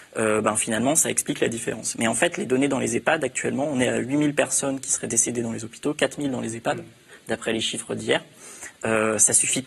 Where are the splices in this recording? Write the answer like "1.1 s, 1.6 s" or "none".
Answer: none

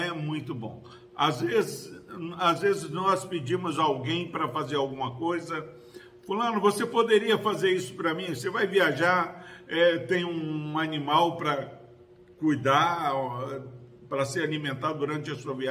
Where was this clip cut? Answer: none

